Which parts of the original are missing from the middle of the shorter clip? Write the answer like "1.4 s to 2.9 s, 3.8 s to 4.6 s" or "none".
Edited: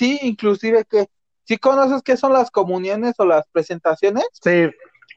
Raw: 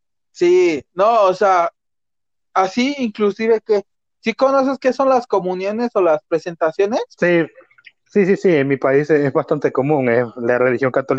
none